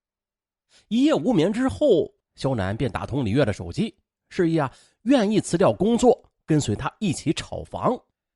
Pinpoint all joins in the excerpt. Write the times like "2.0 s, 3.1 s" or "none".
2.2 s